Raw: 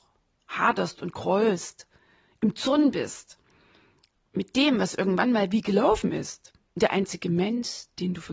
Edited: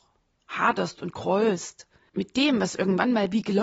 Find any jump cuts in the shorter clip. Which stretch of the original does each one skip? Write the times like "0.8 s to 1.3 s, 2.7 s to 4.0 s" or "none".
2.1 s to 4.3 s

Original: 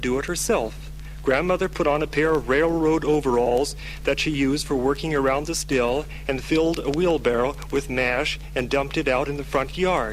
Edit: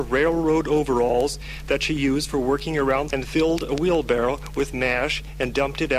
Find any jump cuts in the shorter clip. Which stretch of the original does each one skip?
5.5 s to 6.3 s

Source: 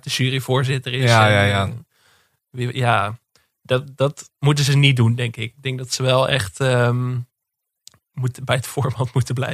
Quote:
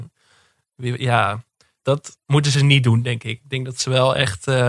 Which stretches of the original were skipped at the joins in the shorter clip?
3.6 s to 4.0 s

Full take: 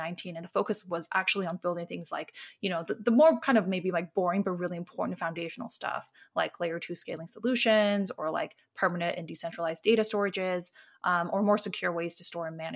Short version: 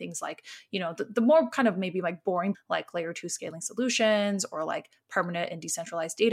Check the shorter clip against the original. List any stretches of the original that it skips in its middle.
4.4 s to 6.2 s

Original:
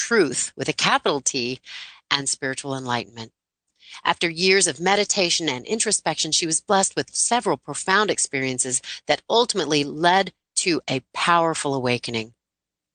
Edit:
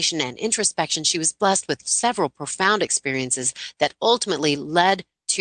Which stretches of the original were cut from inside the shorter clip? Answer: none

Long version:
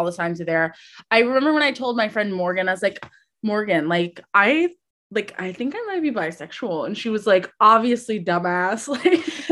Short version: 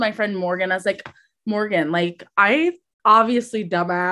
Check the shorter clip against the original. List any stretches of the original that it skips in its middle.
5.0 s to 7.5 s

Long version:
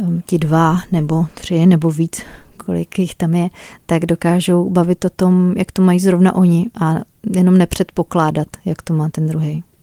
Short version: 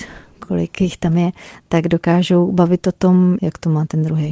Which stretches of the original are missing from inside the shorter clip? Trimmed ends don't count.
5.5 s to 8.6 s

